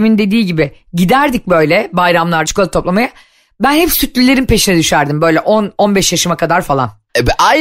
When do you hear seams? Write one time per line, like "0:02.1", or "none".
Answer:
0:02.5